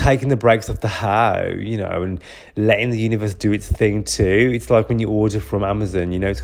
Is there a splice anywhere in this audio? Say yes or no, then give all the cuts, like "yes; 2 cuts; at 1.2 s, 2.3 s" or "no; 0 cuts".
no; 0 cuts